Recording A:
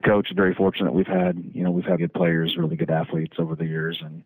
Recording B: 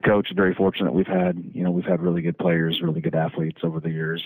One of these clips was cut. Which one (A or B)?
A